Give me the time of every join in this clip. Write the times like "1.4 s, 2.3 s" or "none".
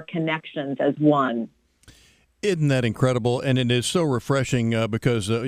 none